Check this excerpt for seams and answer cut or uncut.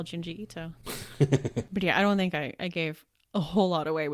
uncut